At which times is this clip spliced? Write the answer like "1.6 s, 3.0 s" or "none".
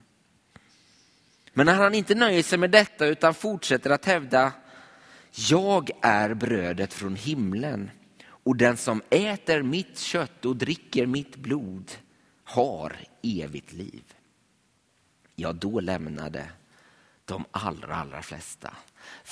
1.5 s